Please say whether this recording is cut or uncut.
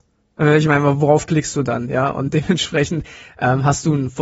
uncut